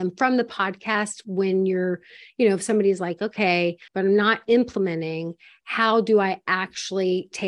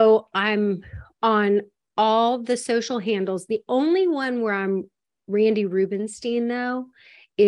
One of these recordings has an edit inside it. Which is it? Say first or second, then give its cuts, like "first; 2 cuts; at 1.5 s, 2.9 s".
first; 1 cut; at 3.9 s